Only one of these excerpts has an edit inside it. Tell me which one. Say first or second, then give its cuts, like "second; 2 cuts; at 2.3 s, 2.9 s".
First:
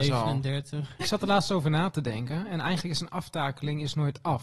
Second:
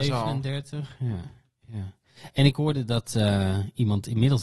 first; 1 cut; at 1.0 s